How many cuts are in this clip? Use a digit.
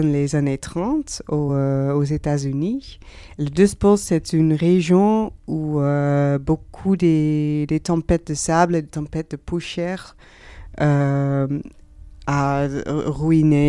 0